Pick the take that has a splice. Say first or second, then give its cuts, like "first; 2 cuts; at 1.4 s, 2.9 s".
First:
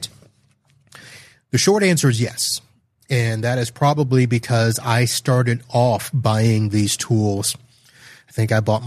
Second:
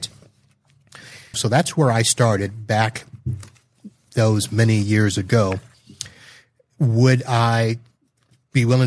second; 1 cut; at 1.3 s